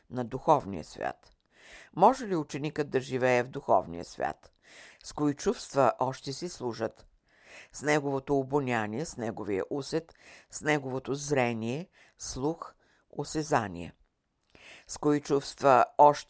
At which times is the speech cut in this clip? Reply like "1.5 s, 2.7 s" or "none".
4.9 s